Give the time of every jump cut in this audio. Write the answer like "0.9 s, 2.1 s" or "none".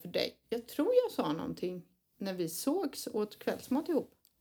none